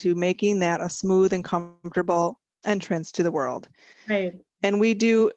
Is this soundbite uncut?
no; 1 cut; at 3.9 s

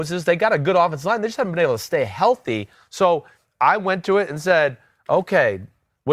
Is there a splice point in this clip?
no; 0 cuts

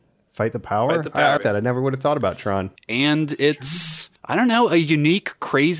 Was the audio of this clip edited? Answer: yes; 3 cuts; at 1.4 s, 2.8 s, 4.2 s

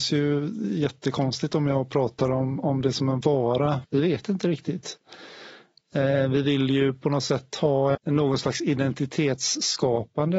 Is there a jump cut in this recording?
yes; 2 cuts; at 3.8 s, 7.9 s

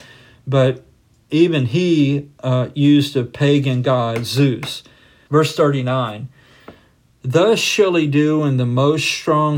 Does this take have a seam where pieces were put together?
yes; 1 cut; at 5.3 s

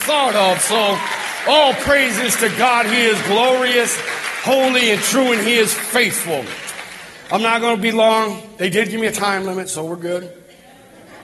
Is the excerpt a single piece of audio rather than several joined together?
yes; 0 cuts

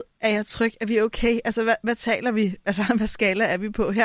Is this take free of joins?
yes; 0 cuts

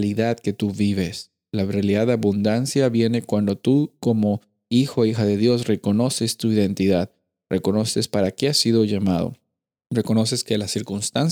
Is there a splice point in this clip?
no; 0 cuts

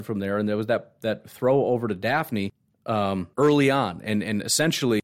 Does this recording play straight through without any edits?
no; 1 cut; at 3.3 s

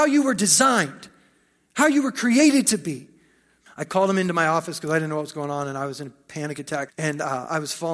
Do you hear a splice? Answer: yes; 2 cuts; at 3.7 s, 6.9 s

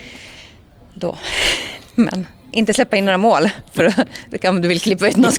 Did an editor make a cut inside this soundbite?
no; 0 cuts

